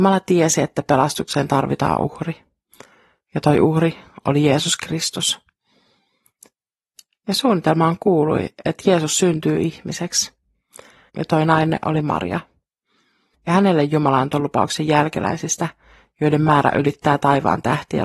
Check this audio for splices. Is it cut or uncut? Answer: cut